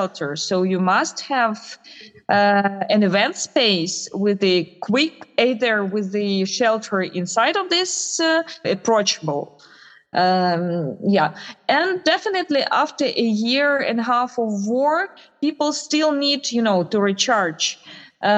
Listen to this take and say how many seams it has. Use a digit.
1